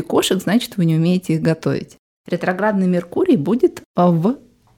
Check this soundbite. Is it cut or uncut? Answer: cut